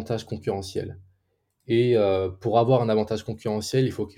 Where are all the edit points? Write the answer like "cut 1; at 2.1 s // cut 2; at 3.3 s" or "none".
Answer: none